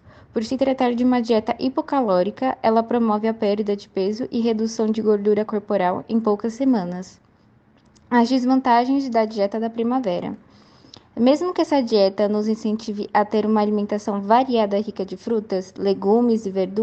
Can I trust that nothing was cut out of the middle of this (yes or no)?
yes